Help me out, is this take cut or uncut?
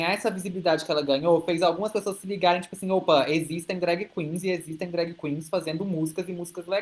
uncut